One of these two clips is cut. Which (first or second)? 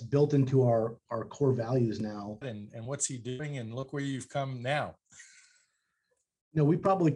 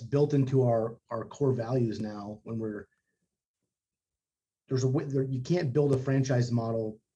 first